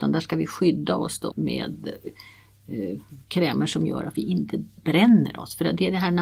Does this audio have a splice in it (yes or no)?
yes